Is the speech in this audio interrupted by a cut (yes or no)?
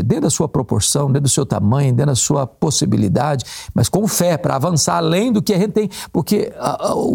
no